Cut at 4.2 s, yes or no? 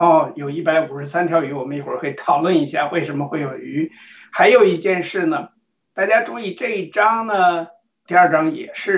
no